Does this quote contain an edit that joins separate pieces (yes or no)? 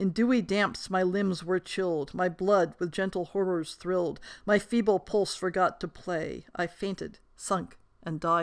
no